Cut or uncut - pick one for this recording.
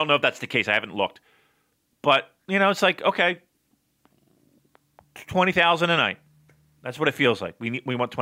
uncut